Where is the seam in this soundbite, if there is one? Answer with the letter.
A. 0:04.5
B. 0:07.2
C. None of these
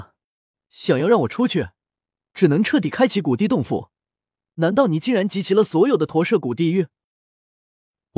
C